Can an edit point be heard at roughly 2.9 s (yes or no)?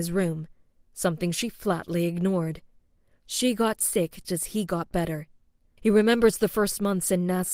no